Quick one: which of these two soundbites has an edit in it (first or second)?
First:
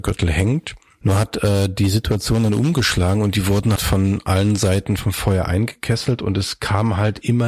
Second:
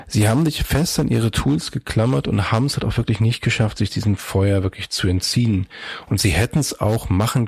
first